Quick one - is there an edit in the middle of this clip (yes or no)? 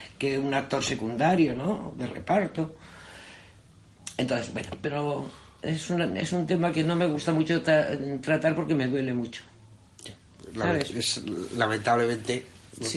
no